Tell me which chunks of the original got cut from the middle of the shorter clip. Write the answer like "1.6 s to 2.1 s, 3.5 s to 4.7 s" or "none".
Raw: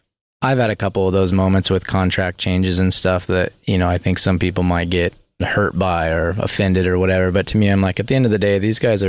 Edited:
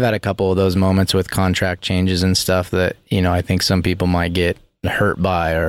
none